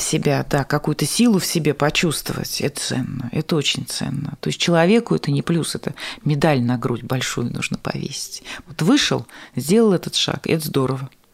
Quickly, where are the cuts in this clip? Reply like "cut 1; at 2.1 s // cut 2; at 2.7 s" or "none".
cut 1; at 2.7 s // cut 2; at 5.4 s // cut 3; at 8.6 s